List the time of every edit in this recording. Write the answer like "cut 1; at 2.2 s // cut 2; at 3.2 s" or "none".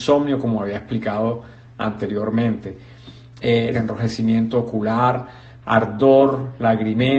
cut 1; at 3.7 s